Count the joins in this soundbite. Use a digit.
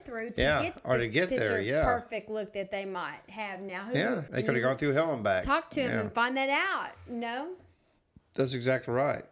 1